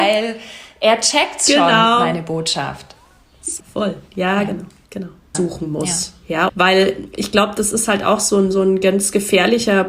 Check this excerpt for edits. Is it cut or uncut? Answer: cut